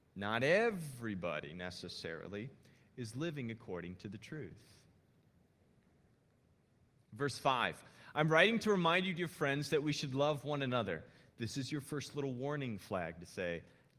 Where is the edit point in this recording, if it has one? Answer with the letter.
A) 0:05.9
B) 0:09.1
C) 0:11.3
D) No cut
C